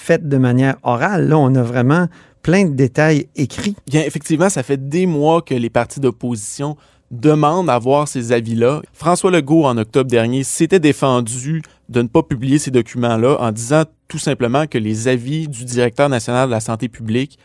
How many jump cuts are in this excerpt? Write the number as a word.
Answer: two